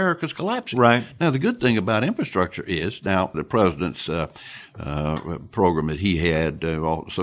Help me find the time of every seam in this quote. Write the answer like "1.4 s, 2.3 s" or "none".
3.3 s

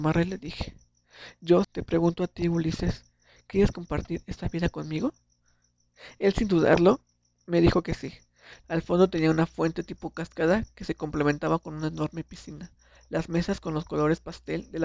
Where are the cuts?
1.6 s, 8.6 s, 13.0 s

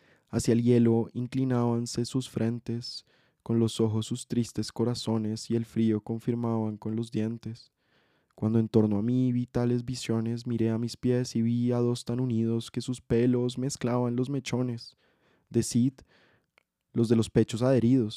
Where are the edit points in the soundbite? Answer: none

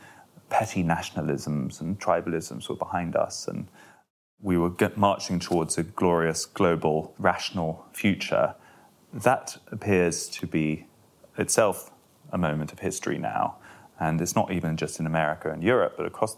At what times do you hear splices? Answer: none

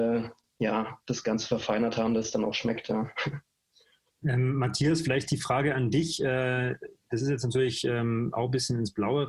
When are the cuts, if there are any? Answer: none

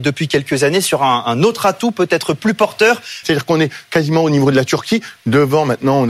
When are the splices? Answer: 3.2 s

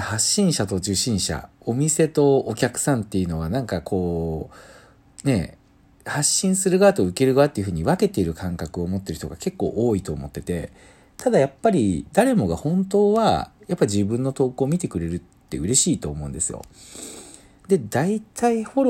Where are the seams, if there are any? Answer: 17.6 s

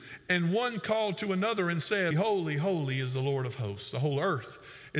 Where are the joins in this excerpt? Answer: 2.1 s

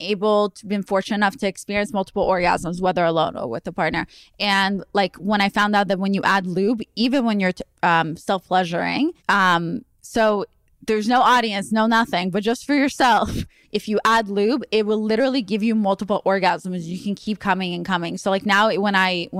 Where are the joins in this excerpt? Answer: 9.2 s, 13.6 s

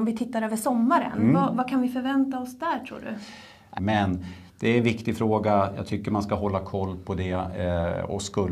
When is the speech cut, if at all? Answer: 3.8 s

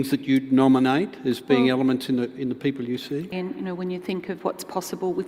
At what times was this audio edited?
3.3 s

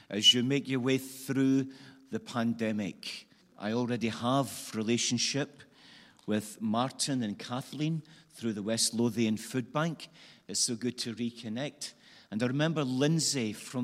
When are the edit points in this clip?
3.4 s

